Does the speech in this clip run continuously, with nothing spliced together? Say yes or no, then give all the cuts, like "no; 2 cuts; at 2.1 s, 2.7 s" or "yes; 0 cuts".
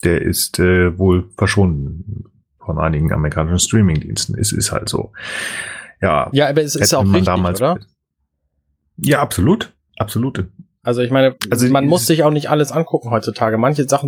yes; 0 cuts